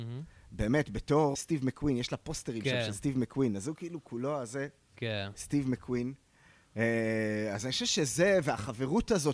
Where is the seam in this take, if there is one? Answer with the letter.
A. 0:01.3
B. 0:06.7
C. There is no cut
A